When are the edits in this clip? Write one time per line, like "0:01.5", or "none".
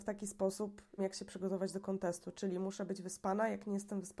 0:01.0